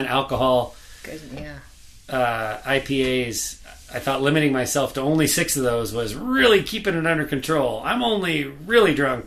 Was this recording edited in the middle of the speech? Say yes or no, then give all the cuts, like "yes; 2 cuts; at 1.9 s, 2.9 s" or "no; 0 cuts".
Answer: no; 0 cuts